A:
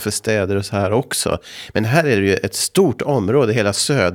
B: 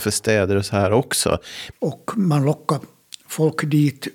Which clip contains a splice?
B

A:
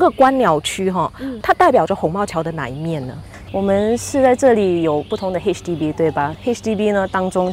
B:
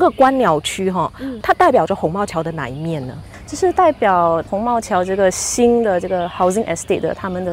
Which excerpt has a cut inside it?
A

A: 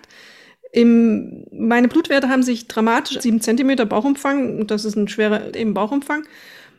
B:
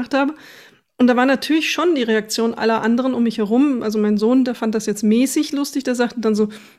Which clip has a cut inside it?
A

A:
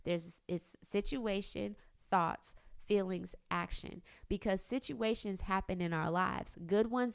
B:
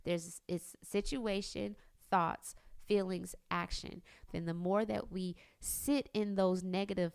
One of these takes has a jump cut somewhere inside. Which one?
B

